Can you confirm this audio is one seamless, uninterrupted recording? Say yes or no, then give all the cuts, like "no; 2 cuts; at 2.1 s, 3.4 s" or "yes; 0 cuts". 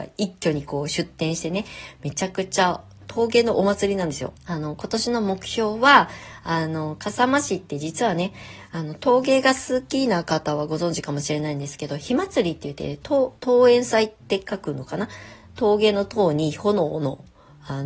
no; 2 cuts; at 4.4 s, 13.4 s